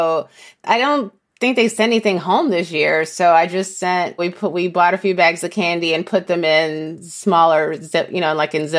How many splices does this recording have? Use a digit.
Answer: 1